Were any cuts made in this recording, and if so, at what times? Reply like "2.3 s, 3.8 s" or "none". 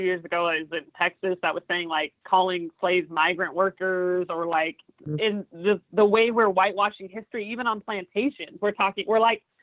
none